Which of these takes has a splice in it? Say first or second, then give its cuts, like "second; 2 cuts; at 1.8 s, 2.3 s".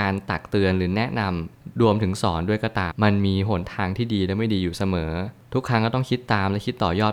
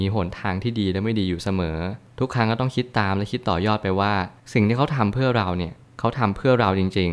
first; 1 cut; at 2.9 s